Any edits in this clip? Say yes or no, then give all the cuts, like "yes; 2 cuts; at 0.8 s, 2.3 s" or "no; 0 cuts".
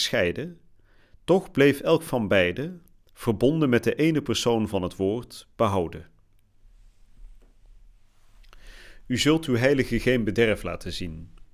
no; 0 cuts